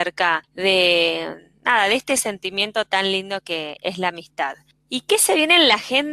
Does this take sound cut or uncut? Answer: uncut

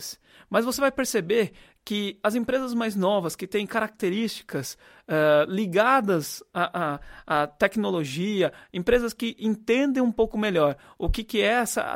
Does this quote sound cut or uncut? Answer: uncut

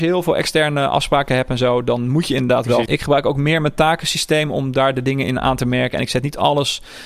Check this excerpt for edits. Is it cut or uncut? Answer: cut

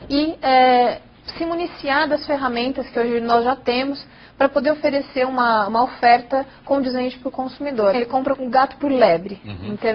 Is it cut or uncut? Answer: cut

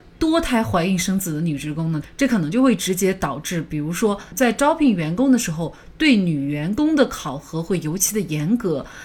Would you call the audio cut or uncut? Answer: cut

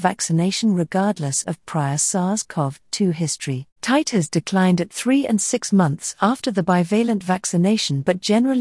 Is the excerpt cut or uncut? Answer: cut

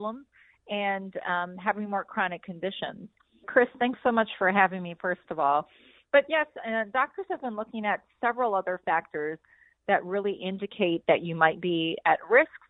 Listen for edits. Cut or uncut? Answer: cut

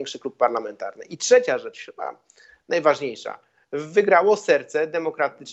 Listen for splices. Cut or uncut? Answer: uncut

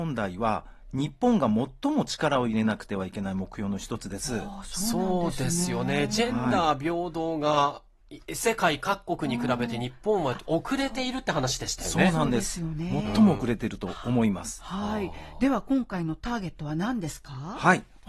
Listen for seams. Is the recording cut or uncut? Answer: uncut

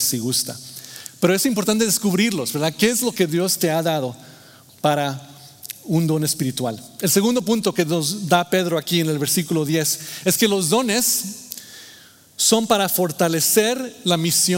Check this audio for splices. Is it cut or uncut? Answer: uncut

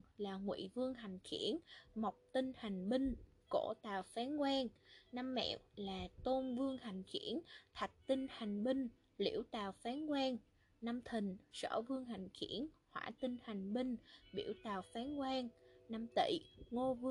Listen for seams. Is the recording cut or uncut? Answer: uncut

